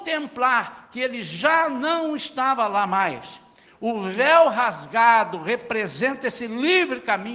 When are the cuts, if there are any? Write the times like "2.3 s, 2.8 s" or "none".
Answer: 3.7 s